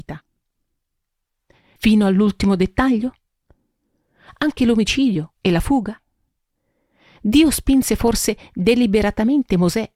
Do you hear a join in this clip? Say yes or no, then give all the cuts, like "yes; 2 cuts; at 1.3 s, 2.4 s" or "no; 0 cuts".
yes; 1 cut; at 1.8 s